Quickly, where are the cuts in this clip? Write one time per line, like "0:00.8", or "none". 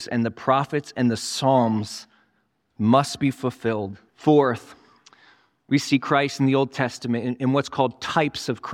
0:04.1